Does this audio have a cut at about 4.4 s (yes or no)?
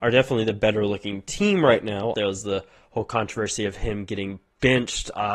no